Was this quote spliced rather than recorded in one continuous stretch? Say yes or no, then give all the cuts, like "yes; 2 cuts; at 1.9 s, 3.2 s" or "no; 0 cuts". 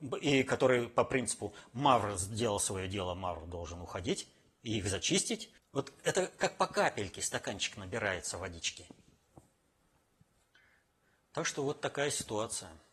yes; 1 cut; at 5.6 s